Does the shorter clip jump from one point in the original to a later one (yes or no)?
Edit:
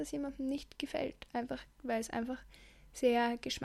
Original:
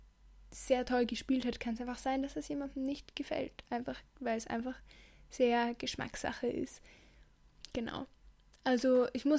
no